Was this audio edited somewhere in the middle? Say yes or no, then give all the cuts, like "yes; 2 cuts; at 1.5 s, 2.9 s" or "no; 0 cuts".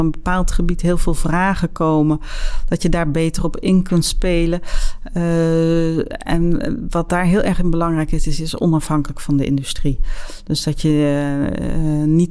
no; 0 cuts